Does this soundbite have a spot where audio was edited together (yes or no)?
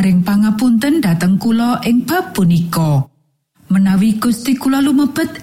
no